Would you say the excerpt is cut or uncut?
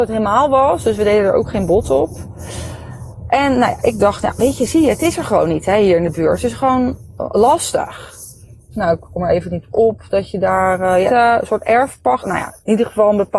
cut